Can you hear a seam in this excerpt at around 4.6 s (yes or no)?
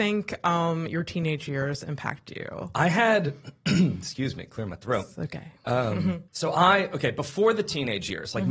no